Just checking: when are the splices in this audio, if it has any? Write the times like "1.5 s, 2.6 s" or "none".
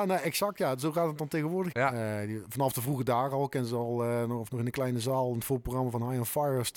1.7 s, 4.5 s